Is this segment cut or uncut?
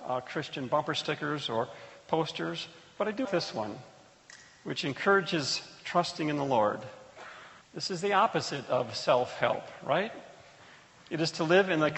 cut